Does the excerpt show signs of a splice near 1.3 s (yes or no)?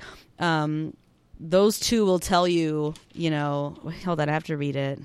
no